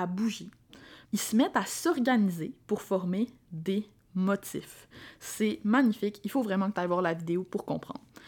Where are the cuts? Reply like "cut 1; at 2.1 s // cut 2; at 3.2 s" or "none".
cut 1; at 1.1 s